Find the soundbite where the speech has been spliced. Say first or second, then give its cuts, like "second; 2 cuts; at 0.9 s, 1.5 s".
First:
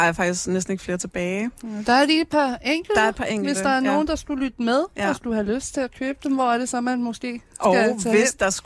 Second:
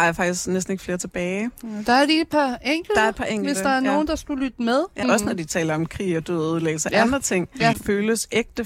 second; 2 cuts; at 5.0 s, 7.7 s